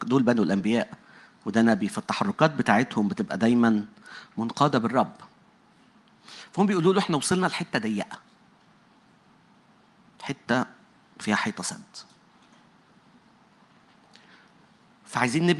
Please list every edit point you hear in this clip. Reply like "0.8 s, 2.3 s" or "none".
none